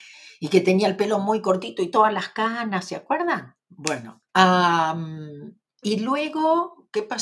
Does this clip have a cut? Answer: yes; 2 cuts; at 4.3 s, 5.8 s

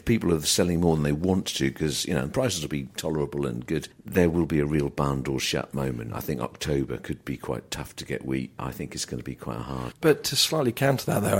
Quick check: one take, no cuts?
no; 1 cut; at 8.6 s

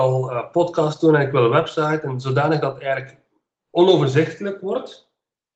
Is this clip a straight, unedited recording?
yes; 0 cuts

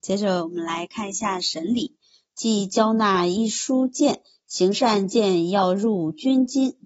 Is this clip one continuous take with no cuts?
no; 1 cut; at 2.3 s

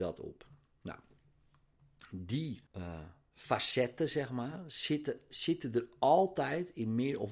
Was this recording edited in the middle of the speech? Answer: yes; 1 cut; at 2.7 s

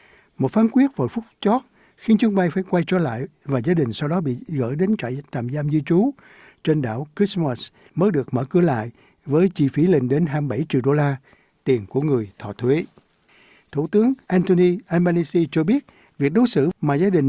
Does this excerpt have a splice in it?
no; 0 cuts

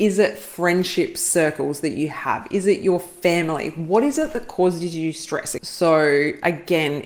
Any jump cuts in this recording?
yes; 1 cut; at 5.6 s

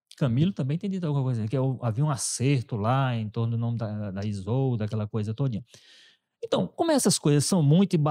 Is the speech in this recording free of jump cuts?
yes; 0 cuts

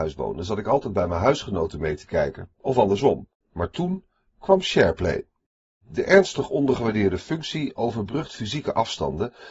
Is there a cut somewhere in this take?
yes; 1 cut; at 3.4 s

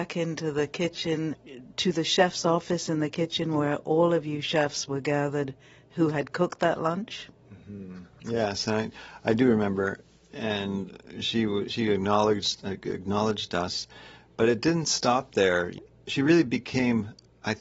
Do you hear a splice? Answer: no; 0 cuts

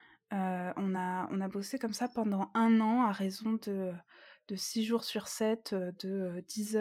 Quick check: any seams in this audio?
no; 0 cuts

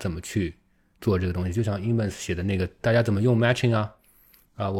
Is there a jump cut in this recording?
no; 0 cuts

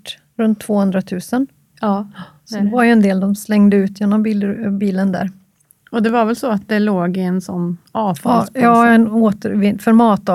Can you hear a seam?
no; 0 cuts

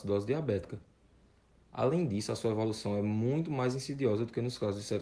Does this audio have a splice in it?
no; 0 cuts

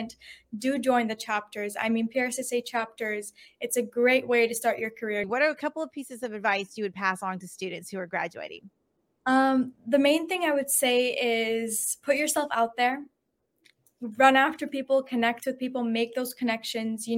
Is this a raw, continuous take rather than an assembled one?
no; 1 cut; at 5.2 s

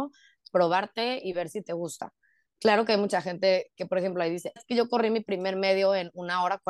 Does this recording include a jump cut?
yes; 1 cut; at 4.6 s

